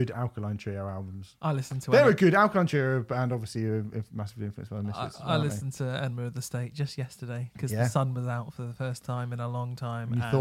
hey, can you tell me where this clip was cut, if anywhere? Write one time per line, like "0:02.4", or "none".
none